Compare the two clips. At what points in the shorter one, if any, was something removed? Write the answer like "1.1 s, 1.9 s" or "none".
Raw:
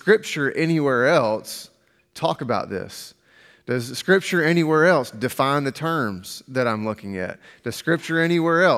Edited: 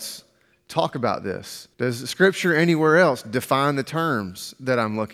1.7 s